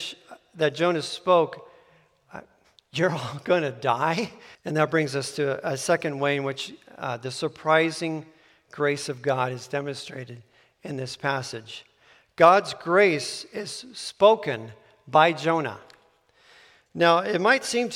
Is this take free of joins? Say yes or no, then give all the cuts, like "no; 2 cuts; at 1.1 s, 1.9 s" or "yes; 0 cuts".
no; 1 cut; at 4.5 s